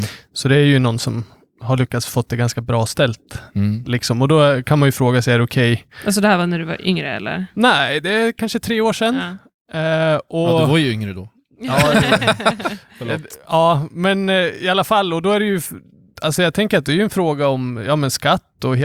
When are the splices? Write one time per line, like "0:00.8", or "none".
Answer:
none